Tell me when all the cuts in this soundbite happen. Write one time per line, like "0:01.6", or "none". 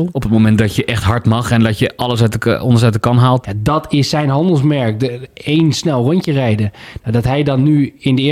0:03.4